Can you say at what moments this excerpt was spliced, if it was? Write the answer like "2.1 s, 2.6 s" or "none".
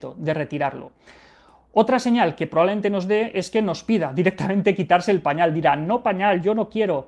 none

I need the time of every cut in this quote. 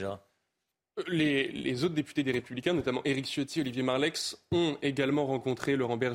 none

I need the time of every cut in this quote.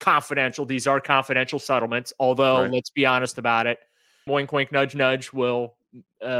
4.3 s

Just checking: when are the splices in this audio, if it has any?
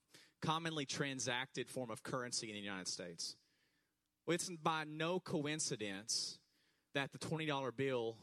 none

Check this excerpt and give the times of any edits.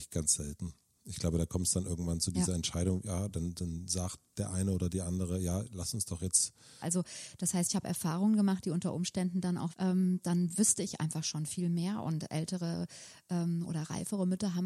6.8 s, 9.7 s

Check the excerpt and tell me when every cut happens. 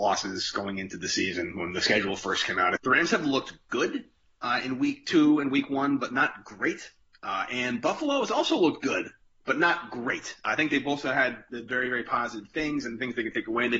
2.8 s

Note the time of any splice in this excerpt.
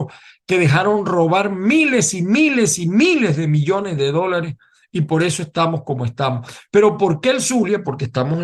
none

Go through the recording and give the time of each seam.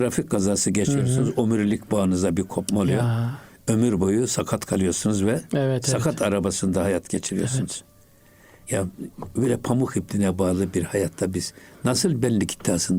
none

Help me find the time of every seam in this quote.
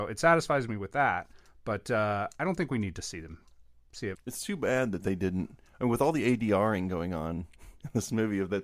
4.2 s

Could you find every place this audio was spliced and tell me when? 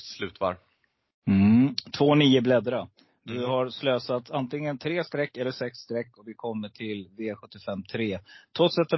none

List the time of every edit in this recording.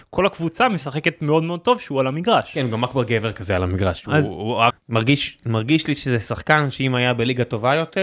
4.7 s

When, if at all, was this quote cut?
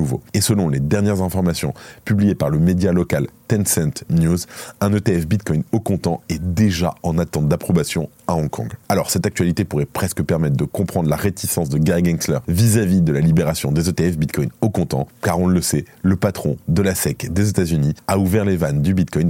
8.8 s

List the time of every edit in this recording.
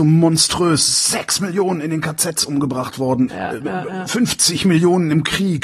3.3 s

